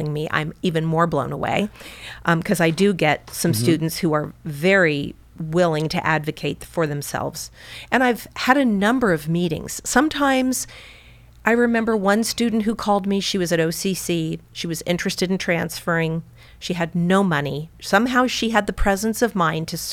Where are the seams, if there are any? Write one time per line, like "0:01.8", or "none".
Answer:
0:17.7